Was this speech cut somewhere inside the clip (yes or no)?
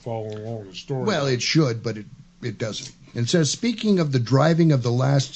yes